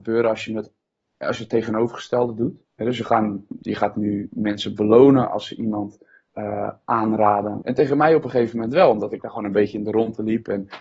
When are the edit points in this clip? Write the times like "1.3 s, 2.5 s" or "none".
2.6 s, 7.6 s